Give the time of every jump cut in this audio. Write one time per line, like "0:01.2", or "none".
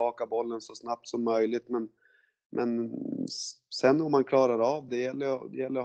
0:04.9